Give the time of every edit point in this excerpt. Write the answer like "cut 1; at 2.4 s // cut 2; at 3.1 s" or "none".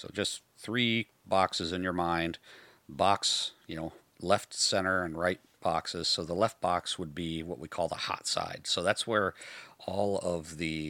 cut 1; at 1.2 s